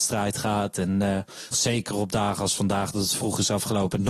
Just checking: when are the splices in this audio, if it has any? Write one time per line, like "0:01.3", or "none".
0:01.5